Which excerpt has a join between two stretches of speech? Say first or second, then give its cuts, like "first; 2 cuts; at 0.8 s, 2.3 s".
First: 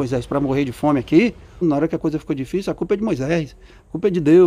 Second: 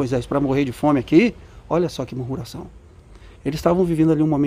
first; 1 cut; at 1.6 s